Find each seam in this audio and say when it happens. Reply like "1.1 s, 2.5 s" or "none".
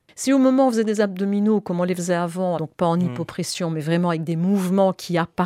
2.6 s